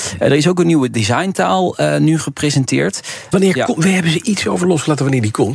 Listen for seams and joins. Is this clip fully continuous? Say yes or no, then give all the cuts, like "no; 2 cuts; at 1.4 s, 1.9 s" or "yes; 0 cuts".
no; 1 cut; at 3.3 s